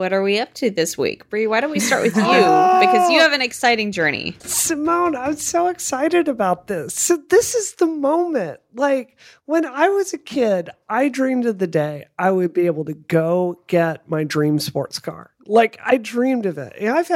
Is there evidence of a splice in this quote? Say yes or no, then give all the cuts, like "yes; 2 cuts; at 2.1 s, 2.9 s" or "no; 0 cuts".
yes; 1 cut; at 4.4 s